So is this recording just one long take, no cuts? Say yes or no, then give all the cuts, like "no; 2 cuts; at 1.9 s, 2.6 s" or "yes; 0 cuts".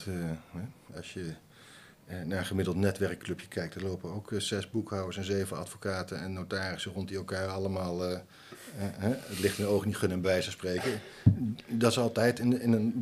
yes; 0 cuts